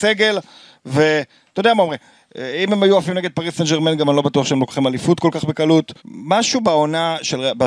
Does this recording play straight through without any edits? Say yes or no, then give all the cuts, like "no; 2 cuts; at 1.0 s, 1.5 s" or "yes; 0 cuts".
no; 1 cut; at 6.0 s